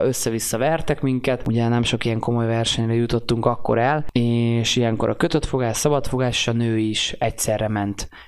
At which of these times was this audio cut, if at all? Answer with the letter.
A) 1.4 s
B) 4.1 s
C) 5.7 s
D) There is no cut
D